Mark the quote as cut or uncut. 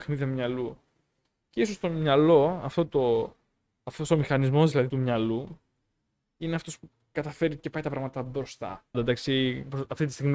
cut